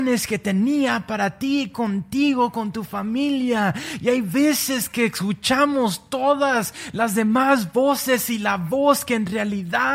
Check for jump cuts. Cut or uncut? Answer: uncut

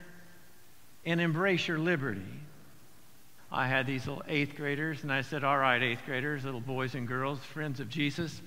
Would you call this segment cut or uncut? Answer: cut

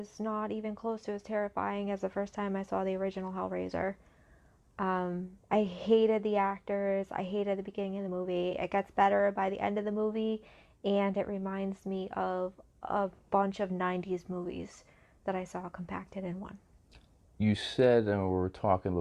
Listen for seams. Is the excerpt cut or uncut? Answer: uncut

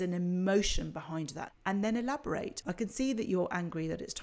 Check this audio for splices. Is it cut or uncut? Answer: cut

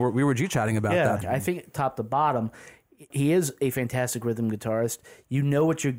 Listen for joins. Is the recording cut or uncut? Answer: cut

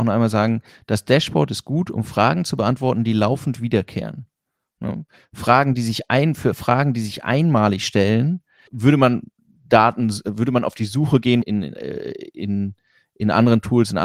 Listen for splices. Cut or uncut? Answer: cut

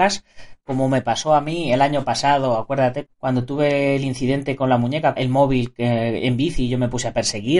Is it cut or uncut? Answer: cut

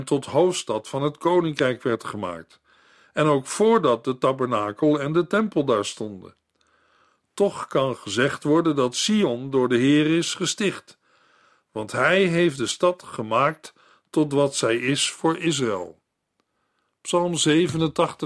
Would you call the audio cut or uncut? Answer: uncut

